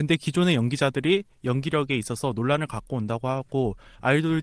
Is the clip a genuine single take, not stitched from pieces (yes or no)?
yes